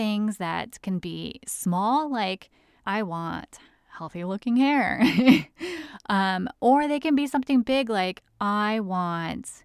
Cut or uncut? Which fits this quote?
cut